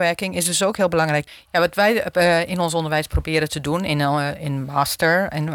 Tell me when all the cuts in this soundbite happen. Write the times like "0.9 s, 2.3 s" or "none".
none